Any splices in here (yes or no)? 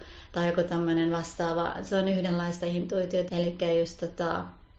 yes